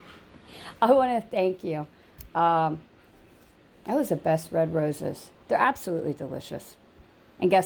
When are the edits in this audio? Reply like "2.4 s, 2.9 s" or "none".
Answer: none